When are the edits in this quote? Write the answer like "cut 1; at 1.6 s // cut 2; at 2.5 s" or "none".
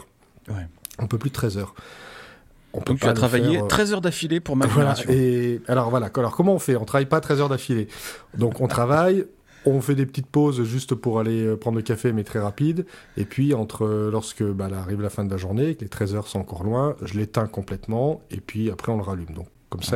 none